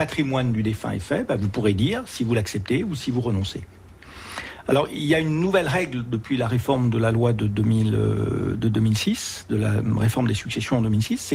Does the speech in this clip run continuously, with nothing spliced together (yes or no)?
yes